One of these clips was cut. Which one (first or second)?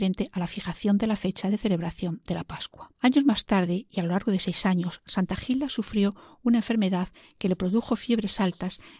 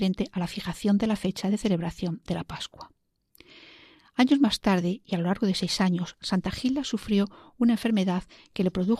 first